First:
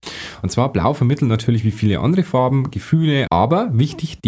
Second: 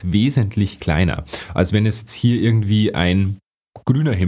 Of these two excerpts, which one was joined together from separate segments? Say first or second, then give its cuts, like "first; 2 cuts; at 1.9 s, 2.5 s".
first; 1 cut; at 3.3 s